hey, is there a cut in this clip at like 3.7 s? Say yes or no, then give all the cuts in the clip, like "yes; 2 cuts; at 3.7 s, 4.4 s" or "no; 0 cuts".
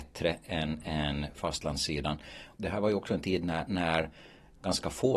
no; 0 cuts